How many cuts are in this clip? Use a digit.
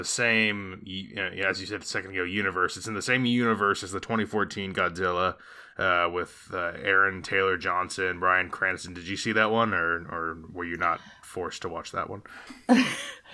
0